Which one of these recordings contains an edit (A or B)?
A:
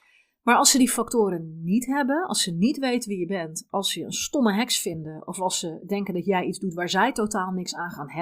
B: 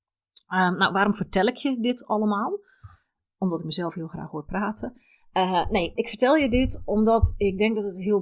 B